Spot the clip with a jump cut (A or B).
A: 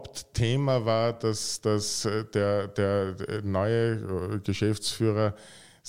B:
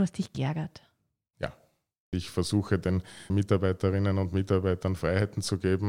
B